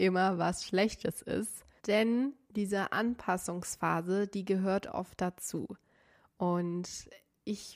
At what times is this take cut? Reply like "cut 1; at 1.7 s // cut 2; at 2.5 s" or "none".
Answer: cut 1; at 1.8 s

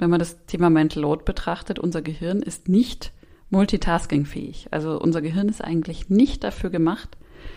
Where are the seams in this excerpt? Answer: none

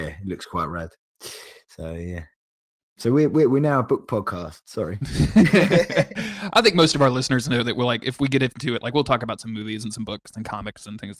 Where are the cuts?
none

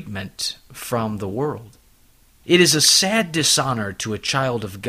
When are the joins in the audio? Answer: cut 1; at 2.4 s

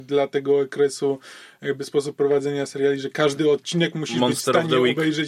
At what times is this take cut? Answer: none

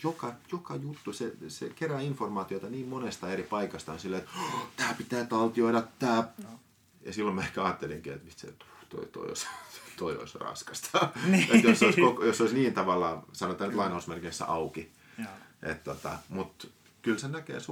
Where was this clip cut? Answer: cut 1; at 6.4 s

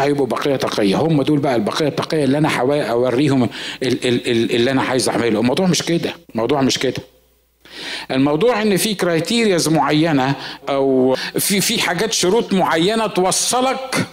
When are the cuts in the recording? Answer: cut 1; at 6.2 s // cut 2; at 10.6 s

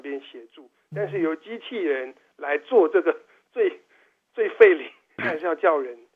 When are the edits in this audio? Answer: cut 1; at 5.2 s

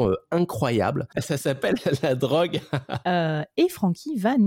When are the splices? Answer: cut 1; at 1.1 s // cut 2; at 3.0 s

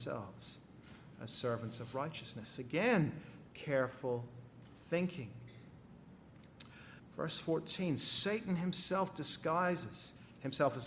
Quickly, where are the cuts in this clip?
cut 1; at 3.5 s // cut 2; at 7.0 s

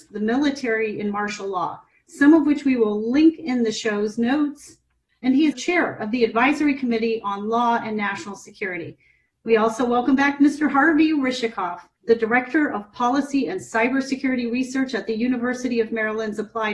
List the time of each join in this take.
cut 1; at 5.5 s // cut 2; at 12.0 s

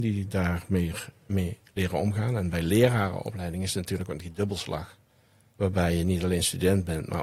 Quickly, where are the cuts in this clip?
none

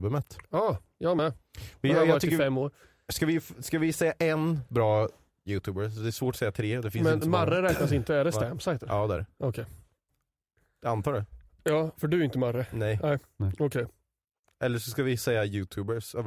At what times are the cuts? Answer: none

